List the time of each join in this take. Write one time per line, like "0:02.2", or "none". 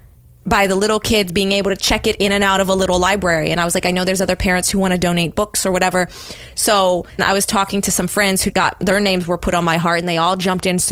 0:07.2
0:08.5